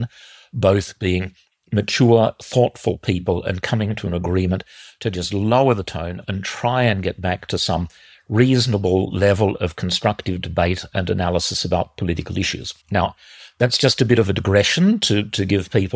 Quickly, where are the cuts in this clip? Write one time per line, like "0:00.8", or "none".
0:12.8